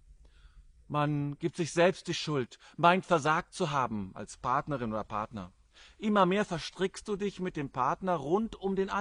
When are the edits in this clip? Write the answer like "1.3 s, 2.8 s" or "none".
none

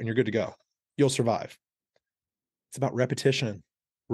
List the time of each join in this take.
2.5 s

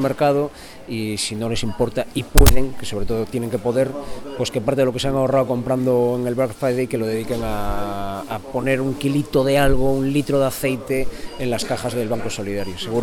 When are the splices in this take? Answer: none

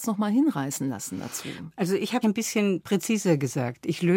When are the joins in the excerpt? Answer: 2.2 s

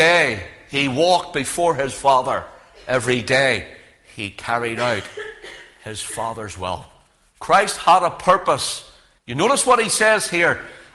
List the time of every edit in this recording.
9.2 s

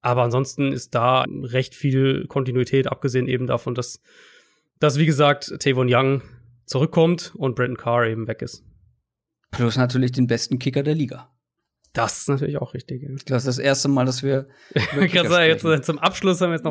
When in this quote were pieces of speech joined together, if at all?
1.2 s

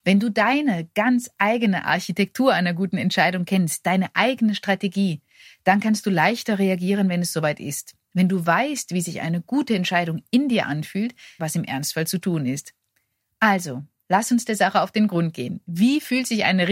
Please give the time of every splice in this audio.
11.4 s

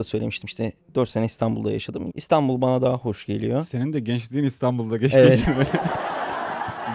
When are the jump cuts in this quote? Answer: 2.1 s

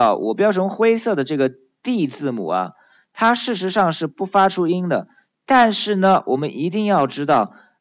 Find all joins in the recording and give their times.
none

